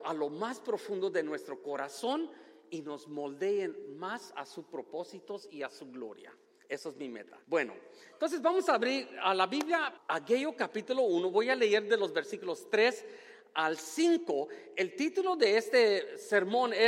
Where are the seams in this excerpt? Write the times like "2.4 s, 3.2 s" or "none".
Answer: 7.4 s, 10.0 s